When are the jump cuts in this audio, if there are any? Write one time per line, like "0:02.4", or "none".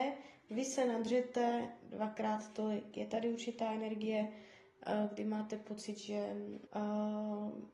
0:06.7